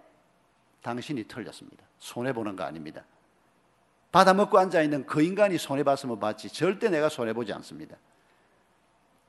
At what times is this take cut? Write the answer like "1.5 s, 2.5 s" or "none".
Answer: none